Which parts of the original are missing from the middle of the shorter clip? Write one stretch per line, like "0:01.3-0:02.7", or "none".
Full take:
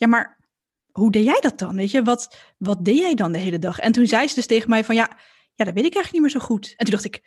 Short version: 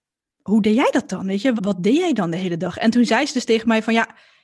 0:02.1-0:02.6